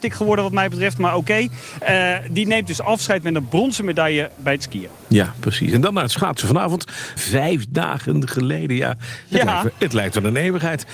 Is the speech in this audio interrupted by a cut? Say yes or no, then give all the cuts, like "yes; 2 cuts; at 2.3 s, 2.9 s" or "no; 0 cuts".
yes; 1 cut; at 7.2 s